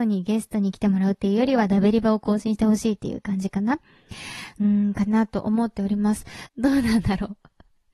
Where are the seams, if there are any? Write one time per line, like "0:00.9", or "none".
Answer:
0:06.5